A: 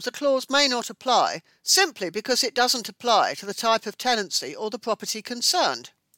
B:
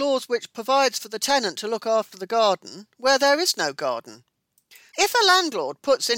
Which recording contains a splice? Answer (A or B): B